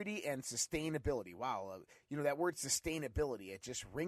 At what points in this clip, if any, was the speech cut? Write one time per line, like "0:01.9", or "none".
none